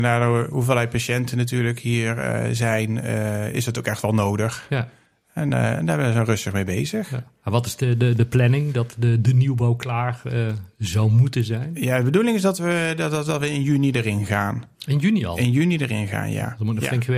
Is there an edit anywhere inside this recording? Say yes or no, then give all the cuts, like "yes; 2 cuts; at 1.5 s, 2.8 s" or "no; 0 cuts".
no; 0 cuts